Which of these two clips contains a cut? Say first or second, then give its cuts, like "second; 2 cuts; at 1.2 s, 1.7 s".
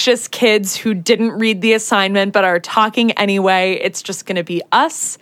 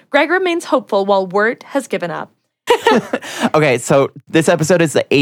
second; 1 cut; at 2.7 s